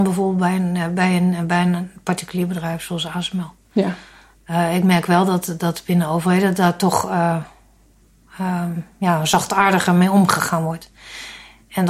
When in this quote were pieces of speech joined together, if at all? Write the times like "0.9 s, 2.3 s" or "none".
none